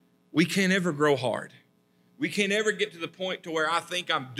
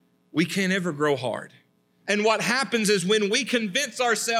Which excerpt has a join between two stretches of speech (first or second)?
second